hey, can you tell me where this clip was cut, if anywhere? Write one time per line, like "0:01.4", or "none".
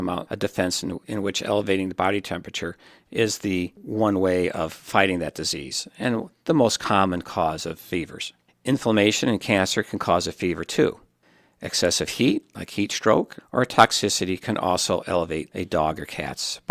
0:13.4